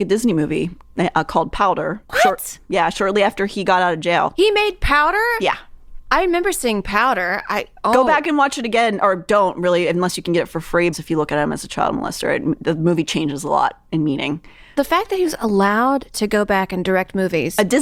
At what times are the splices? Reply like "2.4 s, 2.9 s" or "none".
2.0 s, 10.9 s